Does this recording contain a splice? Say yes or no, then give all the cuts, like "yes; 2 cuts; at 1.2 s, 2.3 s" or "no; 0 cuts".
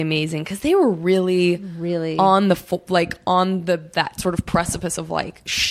no; 0 cuts